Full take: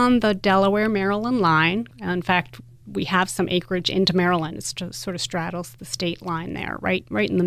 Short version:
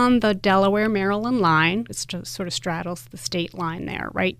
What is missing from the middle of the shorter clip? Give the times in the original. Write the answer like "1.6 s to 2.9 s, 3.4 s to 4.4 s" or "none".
1.9 s to 4.6 s